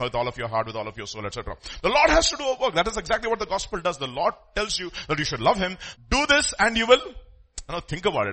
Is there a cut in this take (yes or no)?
yes